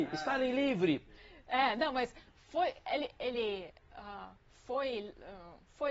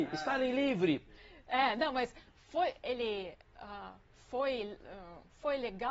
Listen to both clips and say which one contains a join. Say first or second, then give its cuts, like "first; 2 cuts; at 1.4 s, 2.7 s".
second; 1 cut; at 2.8 s